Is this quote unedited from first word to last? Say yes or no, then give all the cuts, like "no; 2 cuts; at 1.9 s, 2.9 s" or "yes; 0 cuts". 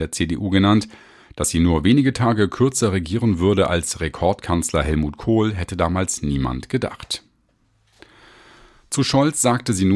yes; 0 cuts